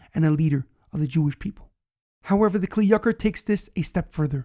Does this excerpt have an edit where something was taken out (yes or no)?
no